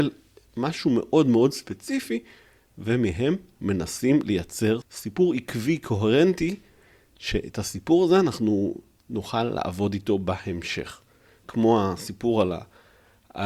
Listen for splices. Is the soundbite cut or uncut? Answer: cut